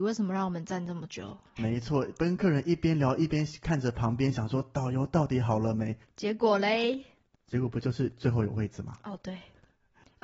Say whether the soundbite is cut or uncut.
cut